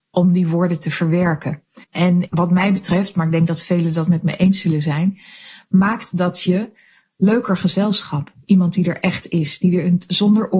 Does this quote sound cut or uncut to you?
cut